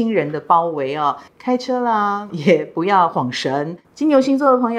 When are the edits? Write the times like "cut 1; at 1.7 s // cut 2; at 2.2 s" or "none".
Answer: cut 1; at 1.3 s // cut 2; at 2.3 s // cut 3; at 3.8 s